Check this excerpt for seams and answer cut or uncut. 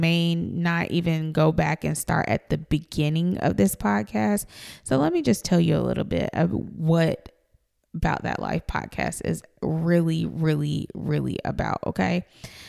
uncut